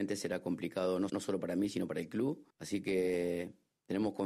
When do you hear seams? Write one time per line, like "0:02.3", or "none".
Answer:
0:01.1
0:02.5